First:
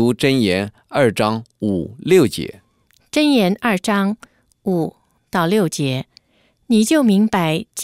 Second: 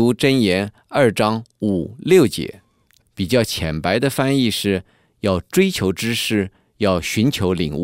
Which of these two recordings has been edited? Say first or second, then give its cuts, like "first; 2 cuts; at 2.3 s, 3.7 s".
second; 1 cut; at 3.0 s